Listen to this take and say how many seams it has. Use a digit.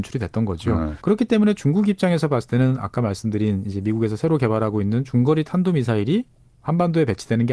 1